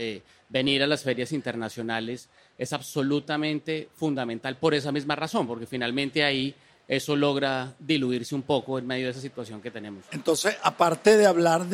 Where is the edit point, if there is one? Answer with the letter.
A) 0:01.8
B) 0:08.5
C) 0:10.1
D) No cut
C